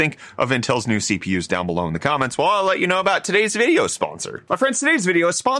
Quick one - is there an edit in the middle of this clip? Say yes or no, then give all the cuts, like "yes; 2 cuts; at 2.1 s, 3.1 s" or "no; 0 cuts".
no; 0 cuts